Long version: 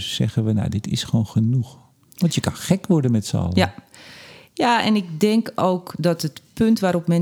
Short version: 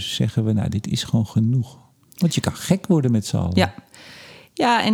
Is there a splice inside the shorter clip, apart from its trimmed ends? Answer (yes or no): no